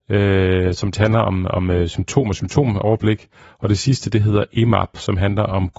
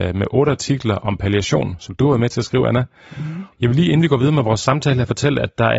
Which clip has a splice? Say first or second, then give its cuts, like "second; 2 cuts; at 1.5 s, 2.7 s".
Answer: second; 1 cut; at 3.5 s